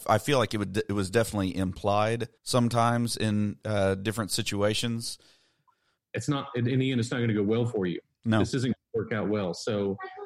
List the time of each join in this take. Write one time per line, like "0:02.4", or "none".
0:02.4
0:06.0